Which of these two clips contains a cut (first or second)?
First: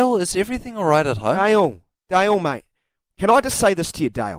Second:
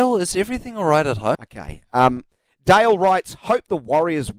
second